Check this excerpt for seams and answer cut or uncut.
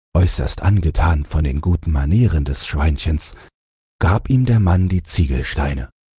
uncut